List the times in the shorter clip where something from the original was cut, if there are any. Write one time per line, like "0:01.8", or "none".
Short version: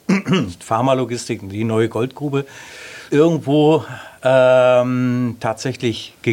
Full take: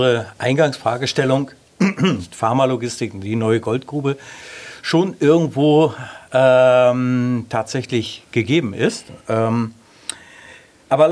0:03.1